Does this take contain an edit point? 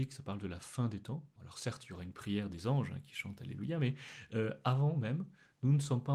yes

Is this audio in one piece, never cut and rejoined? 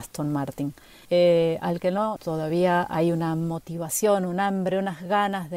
no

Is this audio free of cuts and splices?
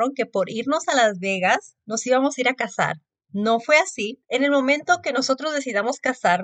no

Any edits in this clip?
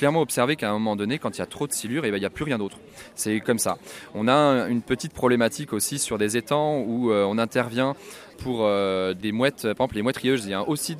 no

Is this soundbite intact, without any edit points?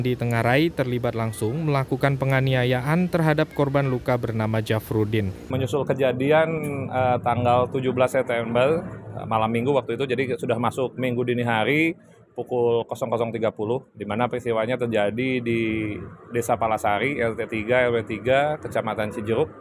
no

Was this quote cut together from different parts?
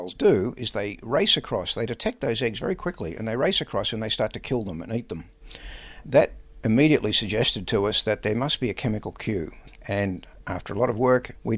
no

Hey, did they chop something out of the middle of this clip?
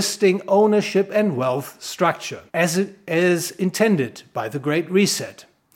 yes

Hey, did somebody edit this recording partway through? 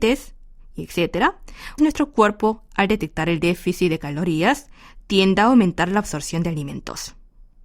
yes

